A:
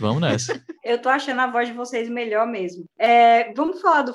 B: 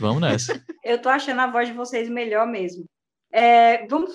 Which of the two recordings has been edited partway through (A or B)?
A